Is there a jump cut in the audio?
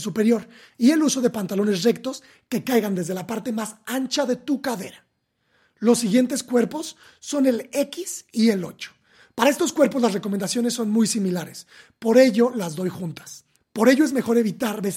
yes; 1 cut; at 13.6 s

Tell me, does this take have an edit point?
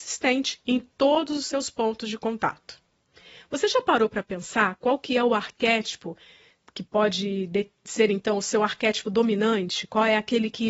no; 0 cuts

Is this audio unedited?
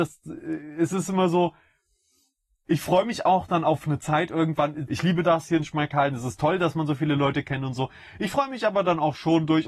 no; 1 cut; at 4.9 s

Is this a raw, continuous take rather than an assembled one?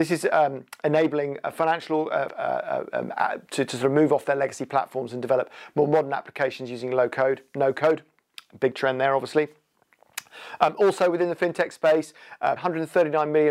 no; 2 cuts; at 2.3 s, 12.6 s

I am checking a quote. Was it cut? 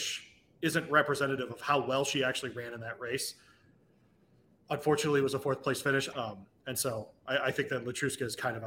yes; 1 cut; at 6.1 s

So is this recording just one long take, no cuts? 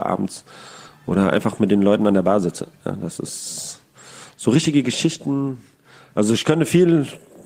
yes; 0 cuts

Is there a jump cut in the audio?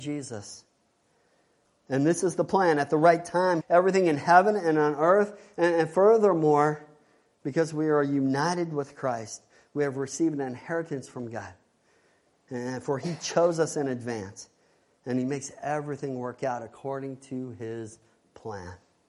yes; 2 cuts; at 1.6 s, 3.6 s

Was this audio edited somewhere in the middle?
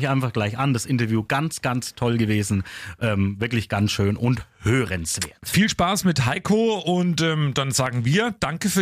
no; 0 cuts

